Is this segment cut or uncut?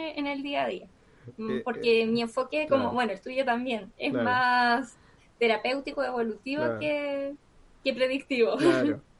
uncut